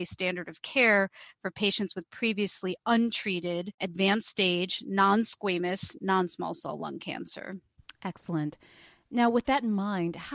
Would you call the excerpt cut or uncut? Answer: uncut